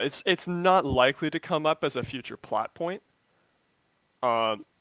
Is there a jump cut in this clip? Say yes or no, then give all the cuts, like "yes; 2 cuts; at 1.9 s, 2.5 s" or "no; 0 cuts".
no; 0 cuts